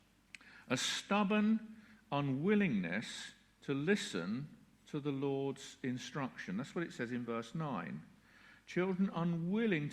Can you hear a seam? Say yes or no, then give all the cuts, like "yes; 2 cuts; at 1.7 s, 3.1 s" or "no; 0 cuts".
no; 0 cuts